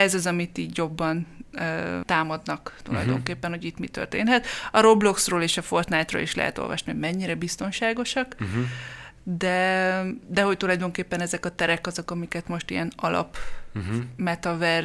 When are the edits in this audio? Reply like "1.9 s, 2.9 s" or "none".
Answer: 2.0 s